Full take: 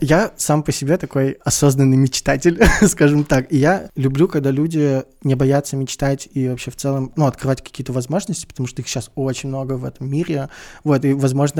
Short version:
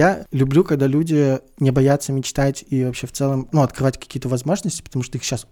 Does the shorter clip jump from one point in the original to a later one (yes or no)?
no